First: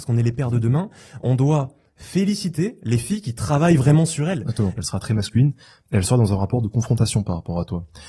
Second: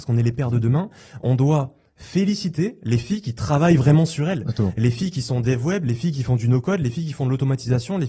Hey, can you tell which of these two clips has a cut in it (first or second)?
first